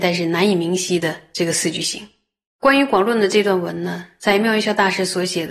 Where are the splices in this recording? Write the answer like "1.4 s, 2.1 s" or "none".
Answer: 2.5 s